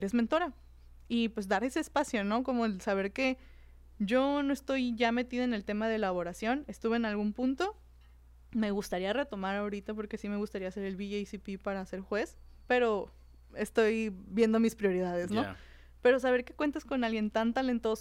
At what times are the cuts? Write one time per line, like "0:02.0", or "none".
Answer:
none